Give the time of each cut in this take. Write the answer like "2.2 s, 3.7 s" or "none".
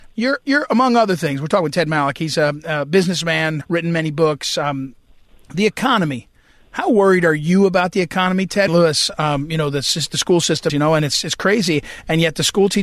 3.6 s, 8.7 s, 10.7 s